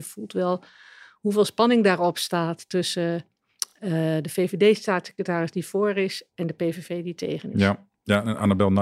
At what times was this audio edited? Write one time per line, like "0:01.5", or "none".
none